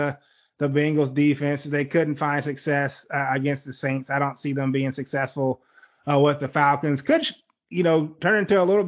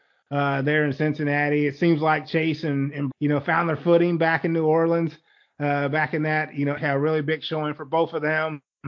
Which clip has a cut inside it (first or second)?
second